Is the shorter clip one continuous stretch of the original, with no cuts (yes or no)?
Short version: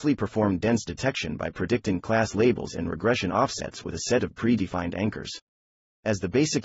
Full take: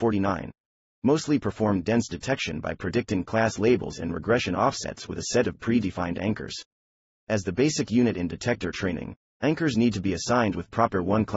yes